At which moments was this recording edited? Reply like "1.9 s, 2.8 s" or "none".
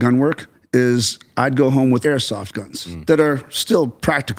2.0 s